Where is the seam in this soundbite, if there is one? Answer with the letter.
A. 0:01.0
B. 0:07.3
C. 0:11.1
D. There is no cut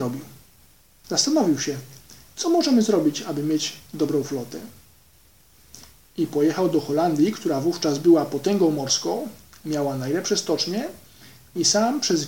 A